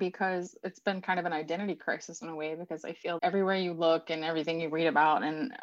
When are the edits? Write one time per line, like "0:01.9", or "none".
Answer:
0:03.2